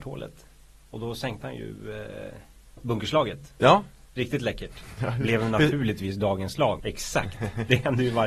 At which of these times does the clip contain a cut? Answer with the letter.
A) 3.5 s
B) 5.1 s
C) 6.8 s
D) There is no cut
C